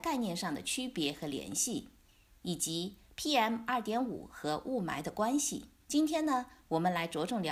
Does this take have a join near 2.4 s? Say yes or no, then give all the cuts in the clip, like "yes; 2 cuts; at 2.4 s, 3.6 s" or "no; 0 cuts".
no; 1 cut; at 5.8 s